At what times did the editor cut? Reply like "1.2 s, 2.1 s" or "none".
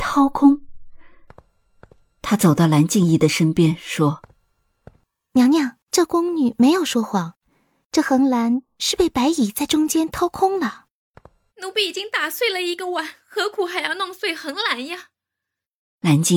5.8 s, 11.5 s